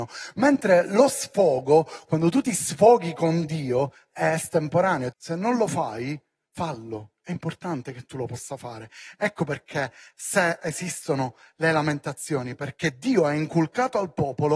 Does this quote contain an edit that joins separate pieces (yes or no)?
yes